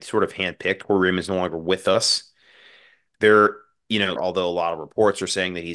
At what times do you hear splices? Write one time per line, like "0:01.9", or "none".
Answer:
0:04.2